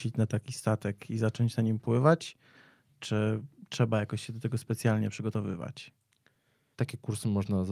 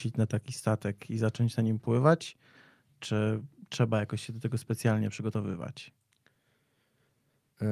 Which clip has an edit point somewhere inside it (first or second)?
first